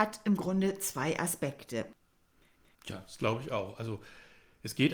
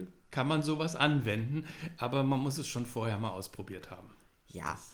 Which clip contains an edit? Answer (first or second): first